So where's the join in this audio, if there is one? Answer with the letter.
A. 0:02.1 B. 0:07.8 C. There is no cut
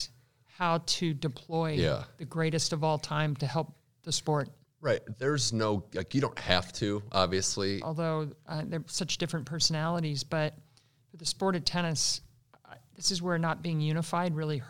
B